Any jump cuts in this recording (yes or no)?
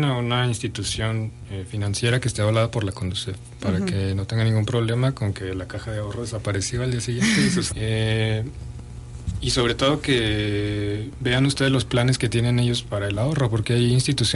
yes